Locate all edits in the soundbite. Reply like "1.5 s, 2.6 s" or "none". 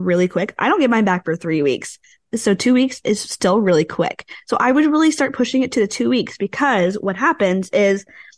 none